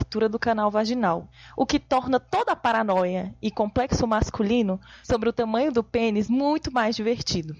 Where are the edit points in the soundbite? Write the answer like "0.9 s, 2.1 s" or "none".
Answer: none